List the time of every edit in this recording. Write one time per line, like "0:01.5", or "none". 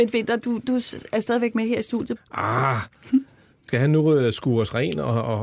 0:02.2
0:03.7